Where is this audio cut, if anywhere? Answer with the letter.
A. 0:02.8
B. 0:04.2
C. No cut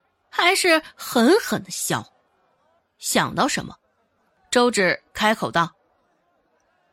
A